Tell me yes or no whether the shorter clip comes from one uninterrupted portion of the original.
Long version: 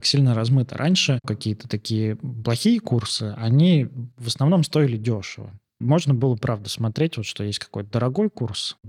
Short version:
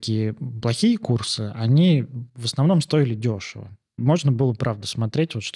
yes